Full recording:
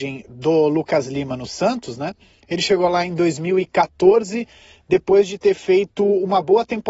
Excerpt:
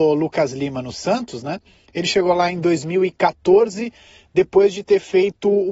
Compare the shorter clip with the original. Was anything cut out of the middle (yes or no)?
no